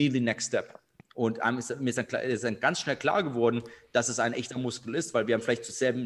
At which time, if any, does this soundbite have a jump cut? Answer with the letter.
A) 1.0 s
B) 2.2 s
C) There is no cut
A